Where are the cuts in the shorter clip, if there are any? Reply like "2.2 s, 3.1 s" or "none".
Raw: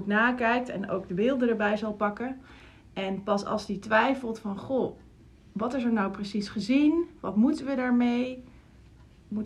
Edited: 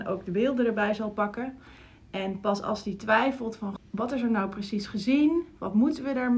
3.8 s

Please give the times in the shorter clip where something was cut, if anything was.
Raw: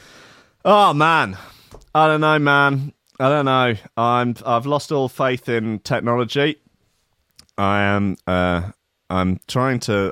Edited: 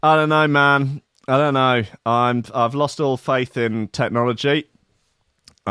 none

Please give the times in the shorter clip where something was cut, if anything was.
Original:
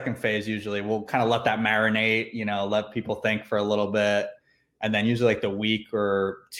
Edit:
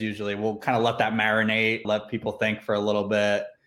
1.8 s

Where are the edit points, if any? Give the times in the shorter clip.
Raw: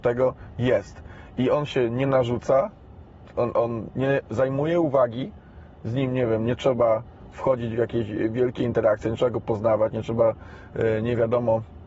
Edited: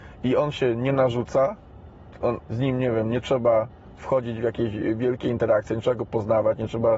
2.4 s

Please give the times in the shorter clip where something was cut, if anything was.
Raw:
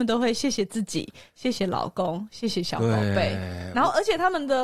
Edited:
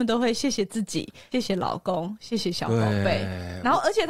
1.3 s

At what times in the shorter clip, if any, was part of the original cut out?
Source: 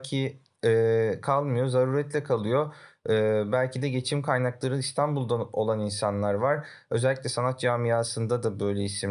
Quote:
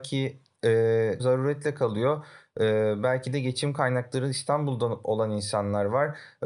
1.2 s

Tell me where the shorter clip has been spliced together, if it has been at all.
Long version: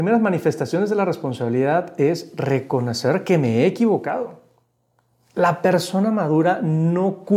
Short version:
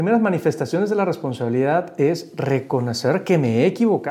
none

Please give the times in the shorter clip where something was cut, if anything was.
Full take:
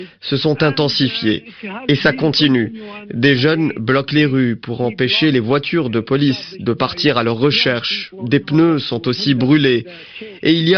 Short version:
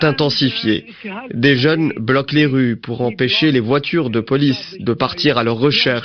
1.3 s

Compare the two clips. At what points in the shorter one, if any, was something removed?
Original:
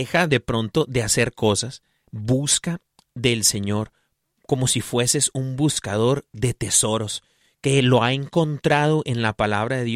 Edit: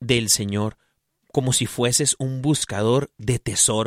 none

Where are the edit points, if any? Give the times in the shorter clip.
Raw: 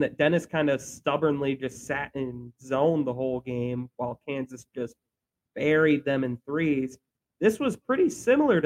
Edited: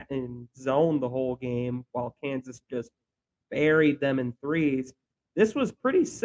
none

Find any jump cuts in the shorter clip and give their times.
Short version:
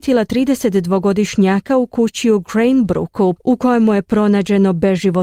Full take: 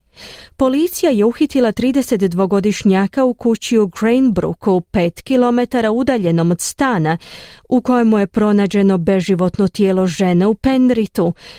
3.4 s

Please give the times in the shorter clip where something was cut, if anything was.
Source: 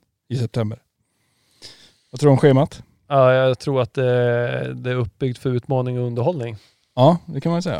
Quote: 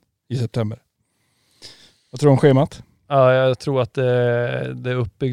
none

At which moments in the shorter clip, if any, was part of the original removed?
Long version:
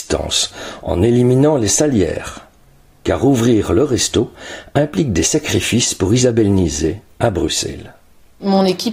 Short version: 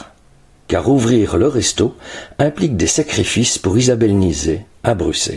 none

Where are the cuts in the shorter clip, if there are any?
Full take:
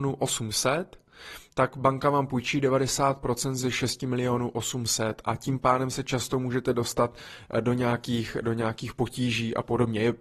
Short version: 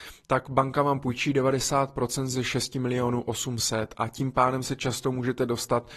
none

